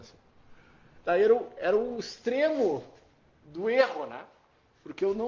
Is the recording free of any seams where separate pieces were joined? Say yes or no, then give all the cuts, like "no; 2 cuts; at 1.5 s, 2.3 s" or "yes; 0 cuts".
yes; 0 cuts